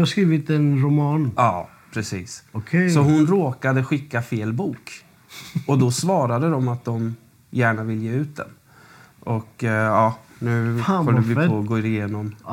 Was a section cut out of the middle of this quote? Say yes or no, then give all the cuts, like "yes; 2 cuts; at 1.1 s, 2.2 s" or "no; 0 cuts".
no; 0 cuts